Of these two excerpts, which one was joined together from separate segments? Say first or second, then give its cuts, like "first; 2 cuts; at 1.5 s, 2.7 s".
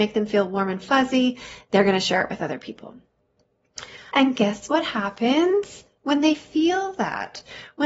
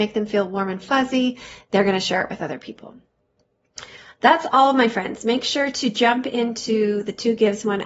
first; 1 cut; at 4.1 s